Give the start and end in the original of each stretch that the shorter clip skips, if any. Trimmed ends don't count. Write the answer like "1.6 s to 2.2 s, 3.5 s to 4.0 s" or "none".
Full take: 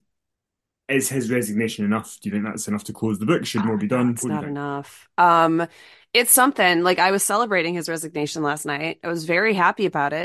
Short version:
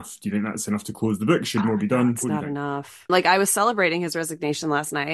5.1 s to 6.8 s